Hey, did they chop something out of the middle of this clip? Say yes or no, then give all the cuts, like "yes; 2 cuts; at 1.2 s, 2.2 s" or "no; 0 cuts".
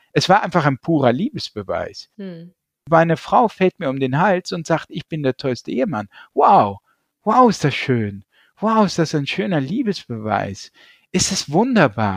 no; 0 cuts